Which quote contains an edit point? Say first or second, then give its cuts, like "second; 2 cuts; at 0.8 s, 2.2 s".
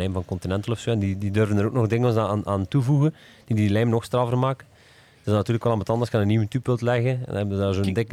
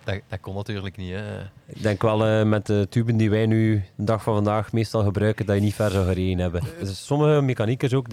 second; 1 cut; at 6.8 s